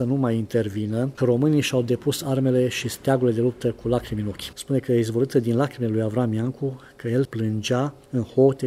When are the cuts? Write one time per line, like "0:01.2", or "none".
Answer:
0:01.2
0:04.5
0:07.3